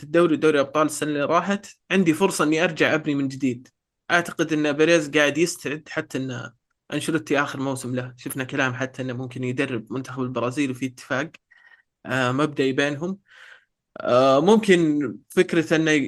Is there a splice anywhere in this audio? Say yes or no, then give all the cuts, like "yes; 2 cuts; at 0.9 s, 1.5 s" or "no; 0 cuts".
no; 0 cuts